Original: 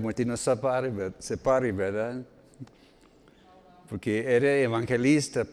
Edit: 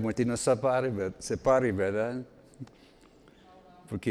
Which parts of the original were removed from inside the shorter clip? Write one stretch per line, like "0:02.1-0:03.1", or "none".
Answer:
none